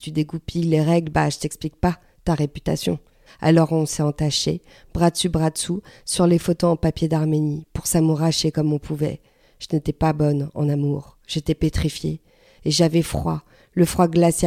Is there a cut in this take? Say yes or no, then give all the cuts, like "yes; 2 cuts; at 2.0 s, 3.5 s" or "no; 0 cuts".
yes; 1 cut; at 3.3 s